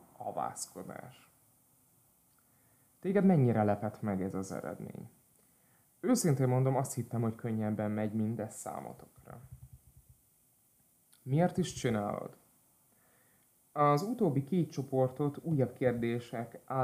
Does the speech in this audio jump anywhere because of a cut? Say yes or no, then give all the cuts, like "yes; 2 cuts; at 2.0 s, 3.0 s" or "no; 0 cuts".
no; 0 cuts